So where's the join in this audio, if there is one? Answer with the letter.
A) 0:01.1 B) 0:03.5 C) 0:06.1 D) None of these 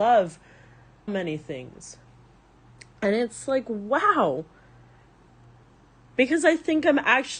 A